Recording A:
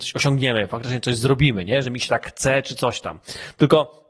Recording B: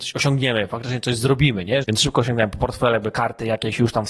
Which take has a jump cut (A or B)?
B